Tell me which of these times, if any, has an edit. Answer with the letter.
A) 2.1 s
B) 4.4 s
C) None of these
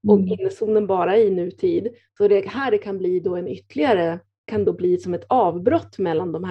B